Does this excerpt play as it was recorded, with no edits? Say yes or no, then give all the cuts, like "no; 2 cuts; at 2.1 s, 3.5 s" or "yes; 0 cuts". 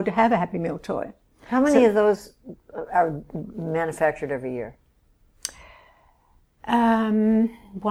yes; 0 cuts